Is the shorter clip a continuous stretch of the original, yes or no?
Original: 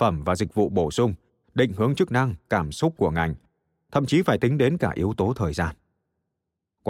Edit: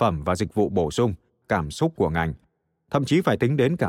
no